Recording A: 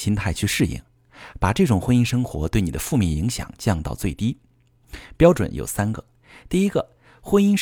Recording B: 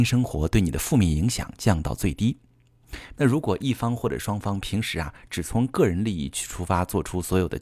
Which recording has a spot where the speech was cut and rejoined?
B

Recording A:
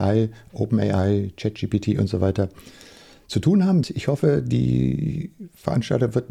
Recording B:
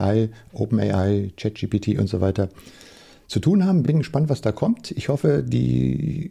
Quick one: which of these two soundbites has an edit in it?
A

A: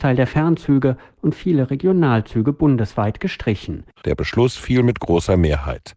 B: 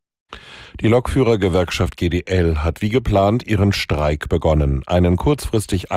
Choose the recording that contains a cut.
A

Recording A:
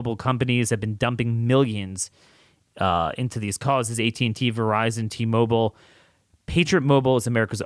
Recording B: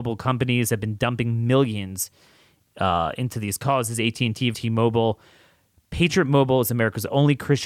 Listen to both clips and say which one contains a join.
B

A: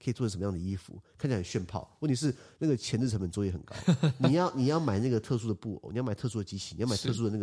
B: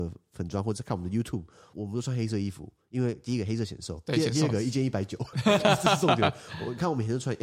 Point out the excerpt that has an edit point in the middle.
B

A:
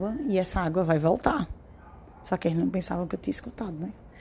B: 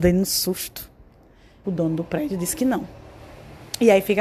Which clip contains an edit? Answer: B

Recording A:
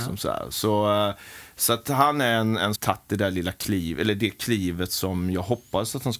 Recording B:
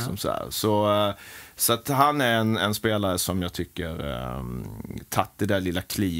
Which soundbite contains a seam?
A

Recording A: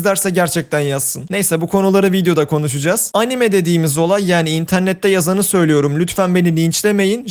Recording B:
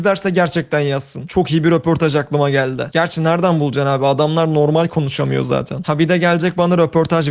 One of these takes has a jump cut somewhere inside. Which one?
A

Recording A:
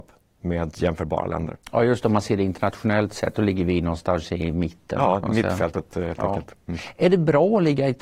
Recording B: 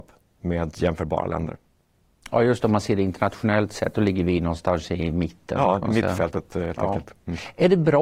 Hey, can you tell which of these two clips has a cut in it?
A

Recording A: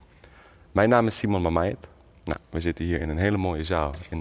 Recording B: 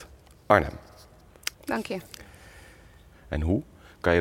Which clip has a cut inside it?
B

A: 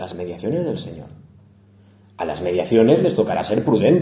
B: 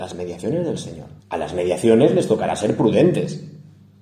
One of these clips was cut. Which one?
B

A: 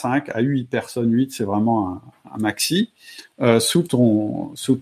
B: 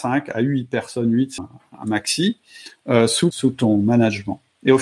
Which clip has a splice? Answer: B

